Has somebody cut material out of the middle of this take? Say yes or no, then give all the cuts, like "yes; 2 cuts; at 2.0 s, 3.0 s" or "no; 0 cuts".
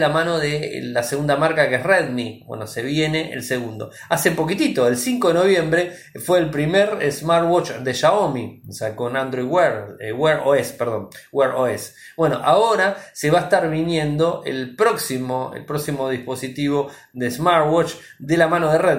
no; 0 cuts